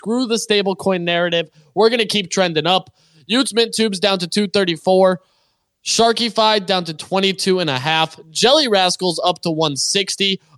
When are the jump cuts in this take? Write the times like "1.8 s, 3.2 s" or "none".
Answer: none